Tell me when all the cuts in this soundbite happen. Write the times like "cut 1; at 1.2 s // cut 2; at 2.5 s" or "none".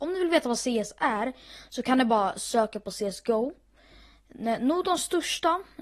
none